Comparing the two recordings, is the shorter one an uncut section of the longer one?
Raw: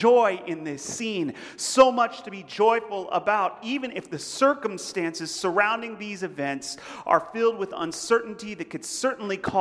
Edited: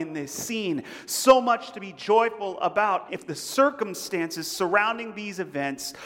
no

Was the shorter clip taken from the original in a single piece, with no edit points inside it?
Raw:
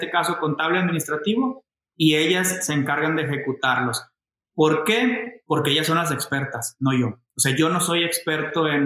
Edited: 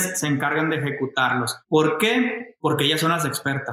no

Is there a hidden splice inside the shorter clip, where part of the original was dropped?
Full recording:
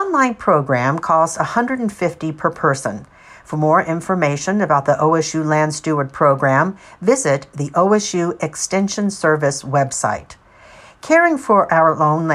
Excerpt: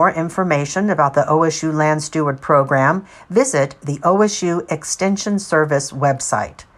no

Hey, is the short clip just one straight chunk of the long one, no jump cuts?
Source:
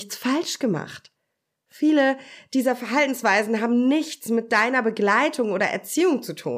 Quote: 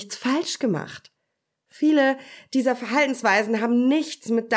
yes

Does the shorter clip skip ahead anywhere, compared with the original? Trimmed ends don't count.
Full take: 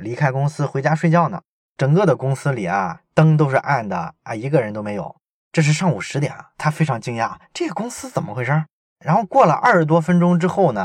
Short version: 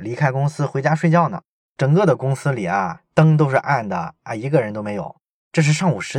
no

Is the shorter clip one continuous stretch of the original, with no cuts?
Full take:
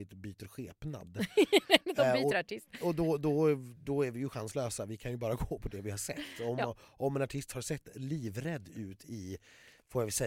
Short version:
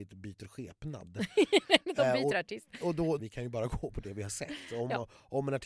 no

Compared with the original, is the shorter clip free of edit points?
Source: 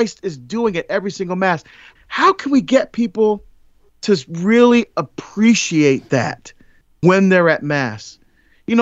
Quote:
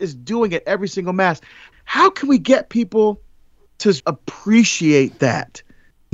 no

